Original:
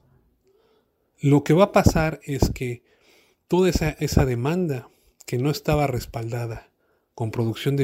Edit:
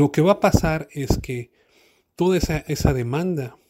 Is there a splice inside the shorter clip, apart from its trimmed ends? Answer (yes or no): no